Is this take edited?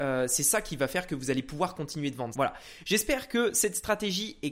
yes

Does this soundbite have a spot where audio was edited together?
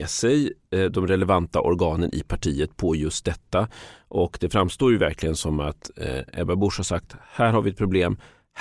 no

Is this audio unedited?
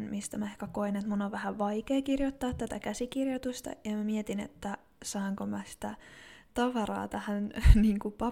yes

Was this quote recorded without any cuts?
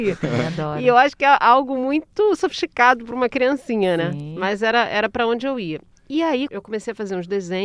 no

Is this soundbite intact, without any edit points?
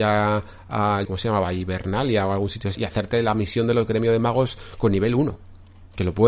no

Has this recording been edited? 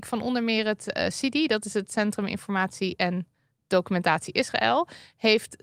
no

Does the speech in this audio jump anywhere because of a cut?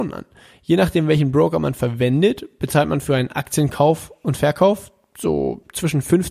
no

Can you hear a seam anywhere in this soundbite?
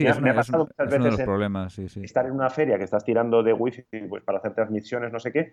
no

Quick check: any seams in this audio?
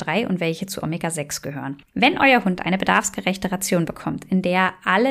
yes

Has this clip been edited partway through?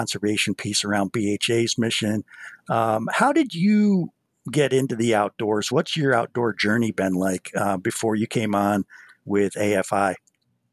no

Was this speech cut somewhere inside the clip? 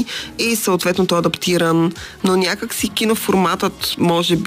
yes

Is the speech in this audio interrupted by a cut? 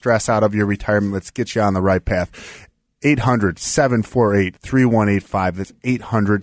no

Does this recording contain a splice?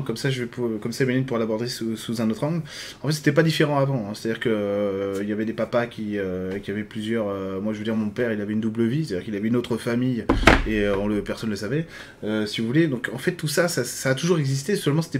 no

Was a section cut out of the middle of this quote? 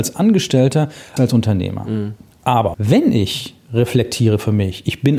yes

